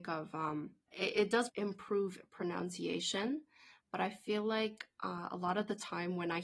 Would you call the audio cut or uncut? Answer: uncut